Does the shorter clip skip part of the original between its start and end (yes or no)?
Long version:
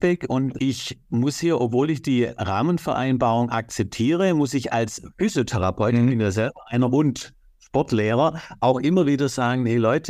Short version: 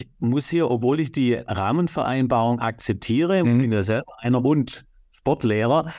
yes